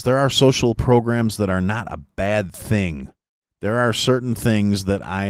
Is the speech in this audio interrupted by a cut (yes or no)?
no